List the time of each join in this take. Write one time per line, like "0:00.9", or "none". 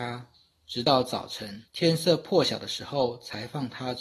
0:01.7